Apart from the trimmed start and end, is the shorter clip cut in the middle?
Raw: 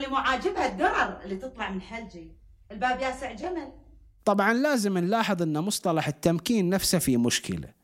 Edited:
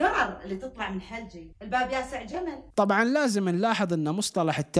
yes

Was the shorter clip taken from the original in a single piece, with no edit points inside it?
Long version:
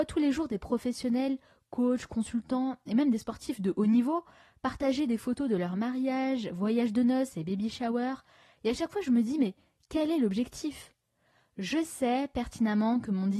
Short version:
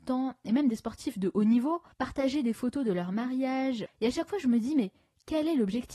no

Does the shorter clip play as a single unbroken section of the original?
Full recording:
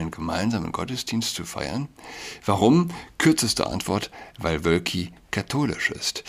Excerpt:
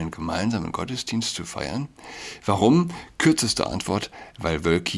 yes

